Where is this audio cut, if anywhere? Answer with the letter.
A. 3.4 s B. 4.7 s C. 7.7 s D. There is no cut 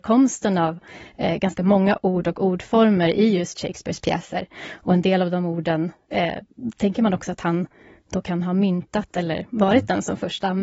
D